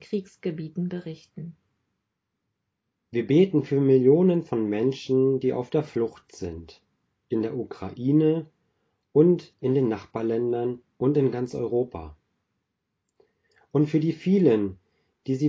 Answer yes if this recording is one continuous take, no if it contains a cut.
yes